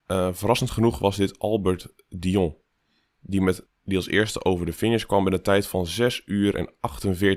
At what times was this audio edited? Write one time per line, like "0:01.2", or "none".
0:03.7